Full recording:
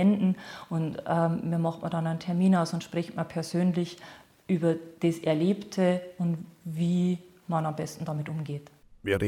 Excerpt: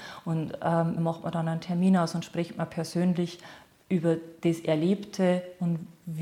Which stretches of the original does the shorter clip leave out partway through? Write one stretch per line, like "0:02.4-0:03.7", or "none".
0:01.4-0:01.6